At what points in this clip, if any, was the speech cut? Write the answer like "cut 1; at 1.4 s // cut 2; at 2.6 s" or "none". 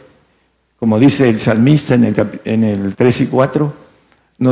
cut 1; at 2.9 s